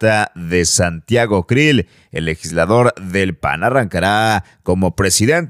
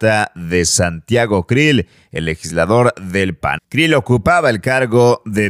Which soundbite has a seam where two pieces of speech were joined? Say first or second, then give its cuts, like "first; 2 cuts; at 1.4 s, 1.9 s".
second; 1 cut; at 3.6 s